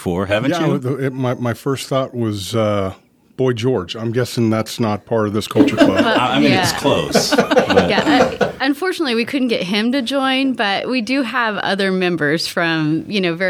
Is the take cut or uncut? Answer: uncut